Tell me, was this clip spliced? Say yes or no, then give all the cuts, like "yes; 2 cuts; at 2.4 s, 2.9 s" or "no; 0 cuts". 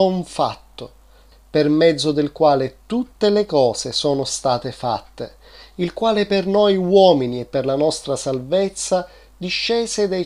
yes; 1 cut; at 1.3 s